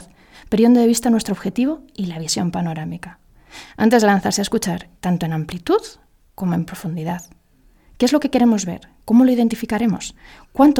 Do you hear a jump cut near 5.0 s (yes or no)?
yes